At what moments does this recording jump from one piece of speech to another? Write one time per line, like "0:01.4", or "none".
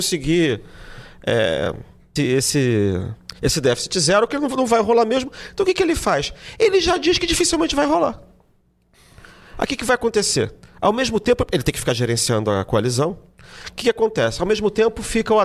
0:02.2